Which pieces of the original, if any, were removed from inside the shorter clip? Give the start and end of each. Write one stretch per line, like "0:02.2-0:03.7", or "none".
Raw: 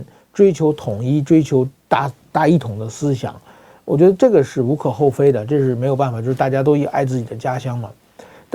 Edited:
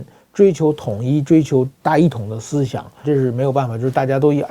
0:01.8-0:02.3
0:03.5-0:05.5